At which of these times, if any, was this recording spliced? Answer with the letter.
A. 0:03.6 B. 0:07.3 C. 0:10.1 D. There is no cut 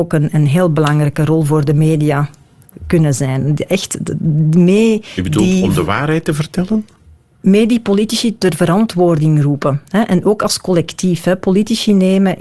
D